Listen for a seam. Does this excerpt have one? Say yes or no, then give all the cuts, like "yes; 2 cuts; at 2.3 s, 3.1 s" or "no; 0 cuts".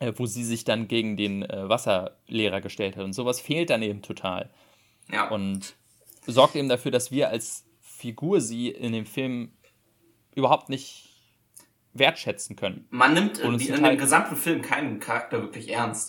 no; 0 cuts